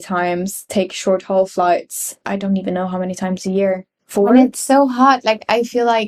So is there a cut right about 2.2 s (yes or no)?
yes